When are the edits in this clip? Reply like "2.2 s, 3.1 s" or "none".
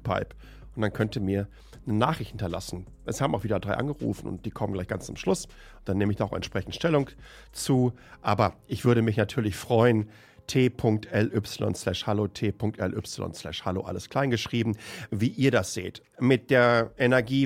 15.1 s